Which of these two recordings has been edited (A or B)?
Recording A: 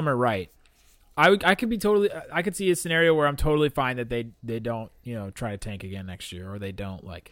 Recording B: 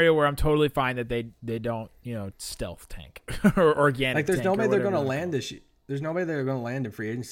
B